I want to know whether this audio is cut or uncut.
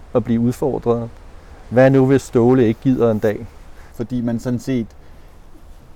cut